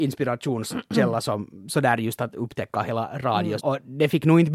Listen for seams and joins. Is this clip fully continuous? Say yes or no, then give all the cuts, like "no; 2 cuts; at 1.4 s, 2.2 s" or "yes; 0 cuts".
no; 1 cut; at 3.6 s